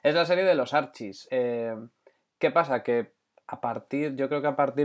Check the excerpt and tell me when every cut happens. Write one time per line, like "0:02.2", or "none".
none